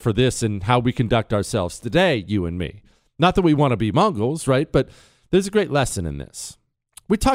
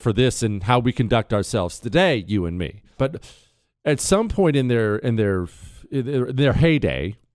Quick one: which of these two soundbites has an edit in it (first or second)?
second